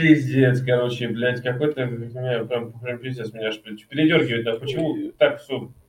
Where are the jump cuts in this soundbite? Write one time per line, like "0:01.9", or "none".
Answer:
none